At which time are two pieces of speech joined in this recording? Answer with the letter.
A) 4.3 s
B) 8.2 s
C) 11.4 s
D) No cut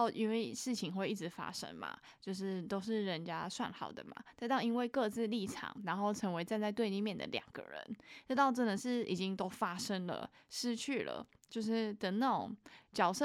D